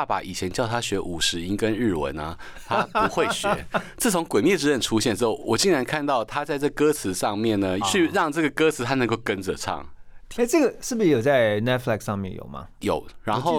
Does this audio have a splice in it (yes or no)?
yes